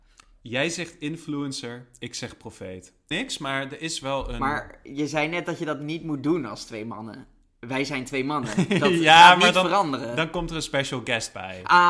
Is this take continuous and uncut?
no; 1 cut; at 3.1 s

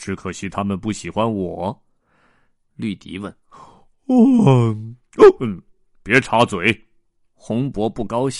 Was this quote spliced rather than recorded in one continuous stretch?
yes; 1 cut; at 2.6 s

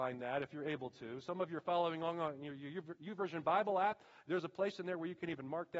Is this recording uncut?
yes; 0 cuts

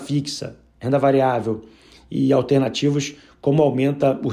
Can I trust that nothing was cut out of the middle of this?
yes; 0 cuts

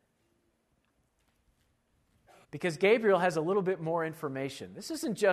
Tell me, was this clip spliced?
yes; 1 cut; at 2.4 s

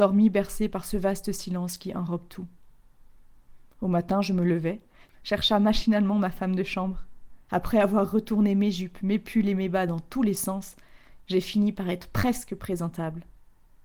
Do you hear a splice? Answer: yes; 1 cut; at 7.5 s

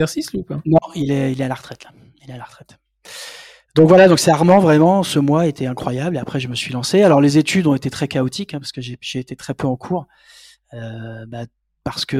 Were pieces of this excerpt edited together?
no; 0 cuts

